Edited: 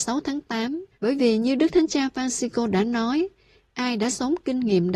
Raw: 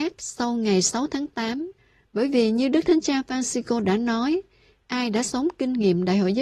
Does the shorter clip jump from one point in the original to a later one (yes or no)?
yes